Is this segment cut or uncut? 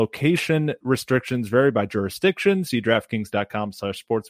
uncut